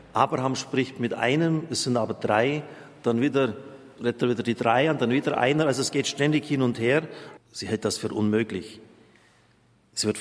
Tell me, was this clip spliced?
yes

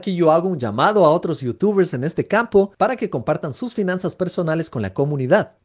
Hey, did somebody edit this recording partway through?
no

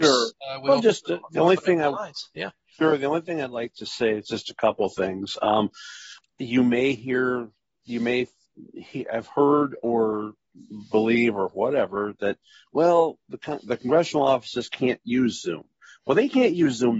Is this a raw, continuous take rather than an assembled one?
no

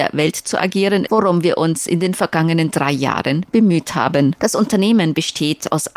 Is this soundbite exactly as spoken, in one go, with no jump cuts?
no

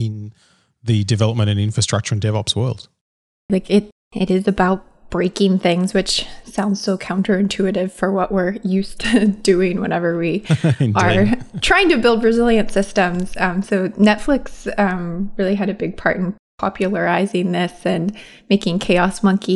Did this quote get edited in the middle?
yes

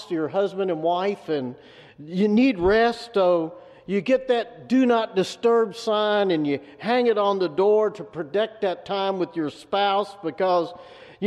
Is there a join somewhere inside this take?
no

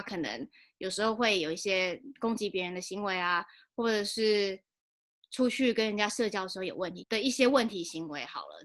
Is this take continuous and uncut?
no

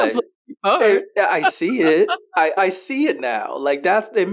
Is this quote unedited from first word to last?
no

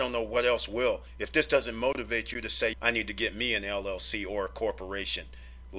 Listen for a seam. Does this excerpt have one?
yes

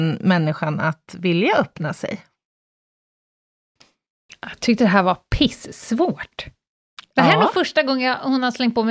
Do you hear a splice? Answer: no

